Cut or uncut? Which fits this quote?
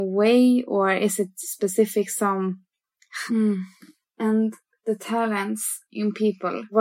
cut